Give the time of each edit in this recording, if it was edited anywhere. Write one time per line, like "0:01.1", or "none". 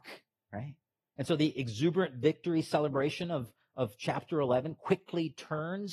none